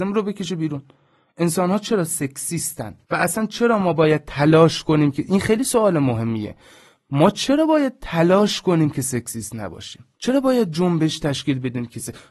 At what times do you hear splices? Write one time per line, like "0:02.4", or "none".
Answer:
0:03.0
0:10.1